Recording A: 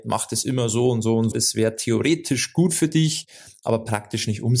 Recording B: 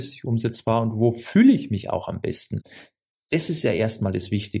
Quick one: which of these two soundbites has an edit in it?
A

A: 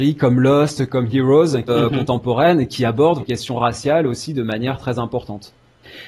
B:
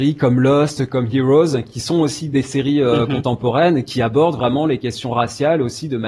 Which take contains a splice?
A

